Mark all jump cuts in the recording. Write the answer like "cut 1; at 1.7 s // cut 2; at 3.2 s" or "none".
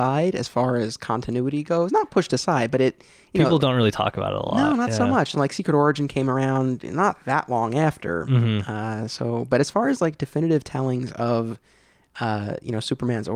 none